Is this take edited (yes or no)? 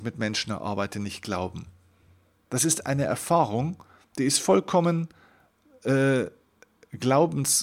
no